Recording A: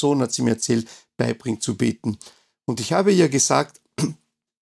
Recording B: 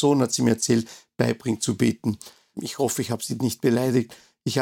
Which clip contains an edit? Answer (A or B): B